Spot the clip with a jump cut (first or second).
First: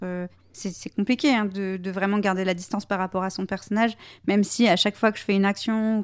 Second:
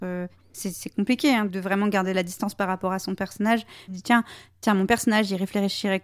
second